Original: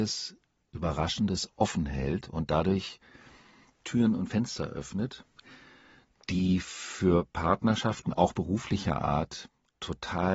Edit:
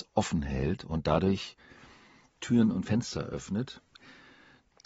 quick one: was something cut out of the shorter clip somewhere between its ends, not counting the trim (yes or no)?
no